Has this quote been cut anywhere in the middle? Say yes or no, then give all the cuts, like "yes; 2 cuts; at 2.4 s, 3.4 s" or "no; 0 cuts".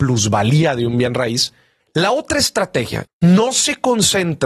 yes; 2 cuts; at 1.8 s, 3.1 s